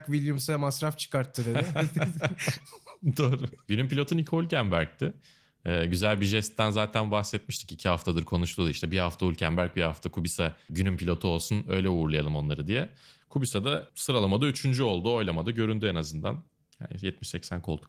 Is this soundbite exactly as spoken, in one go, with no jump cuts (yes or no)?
no